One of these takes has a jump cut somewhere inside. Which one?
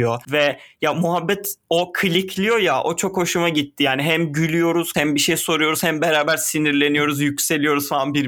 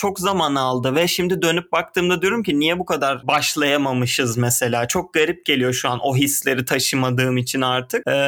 first; 1 cut; at 4.9 s

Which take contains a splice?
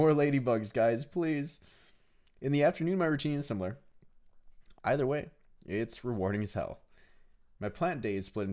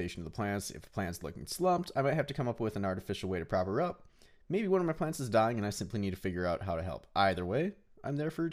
first; 1 cut; at 4.7 s

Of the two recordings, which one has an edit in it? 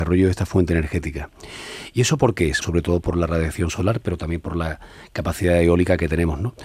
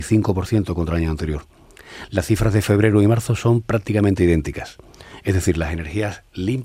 first; 1 cut; at 2.6 s

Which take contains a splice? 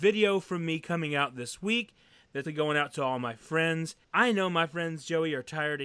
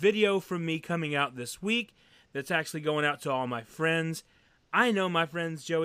first; 2 cuts; at 2.4 s, 4.0 s

